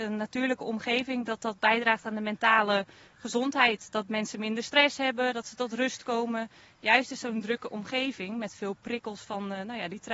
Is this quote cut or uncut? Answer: uncut